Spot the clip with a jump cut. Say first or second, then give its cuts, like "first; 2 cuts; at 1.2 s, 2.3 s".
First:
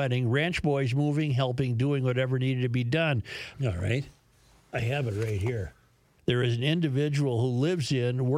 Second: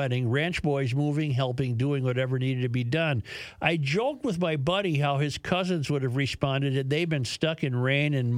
first; 2 cuts; at 3.5 s, 6.2 s